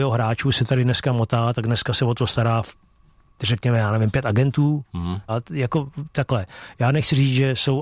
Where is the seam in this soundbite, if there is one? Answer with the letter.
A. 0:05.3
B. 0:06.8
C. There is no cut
A